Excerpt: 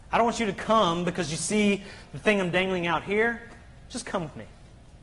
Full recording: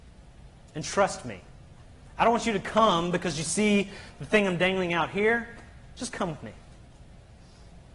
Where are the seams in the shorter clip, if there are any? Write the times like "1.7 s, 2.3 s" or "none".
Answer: none